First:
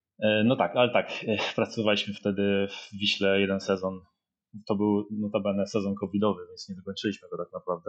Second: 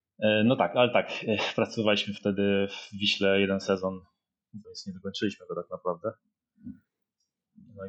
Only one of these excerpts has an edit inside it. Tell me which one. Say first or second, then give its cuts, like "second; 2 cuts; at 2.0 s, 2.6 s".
second; 1 cut; at 4.6 s